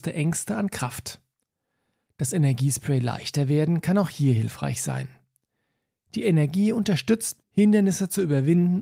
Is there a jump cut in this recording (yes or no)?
yes